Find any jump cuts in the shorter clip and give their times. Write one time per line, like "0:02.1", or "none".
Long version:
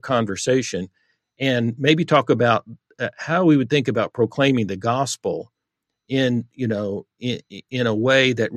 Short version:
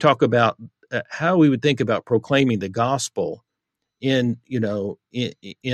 none